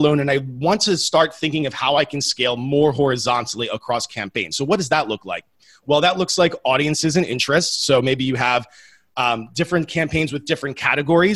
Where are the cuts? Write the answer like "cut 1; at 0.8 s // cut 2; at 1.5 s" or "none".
none